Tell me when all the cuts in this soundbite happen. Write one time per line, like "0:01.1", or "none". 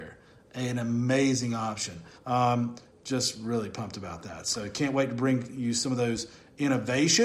0:02.2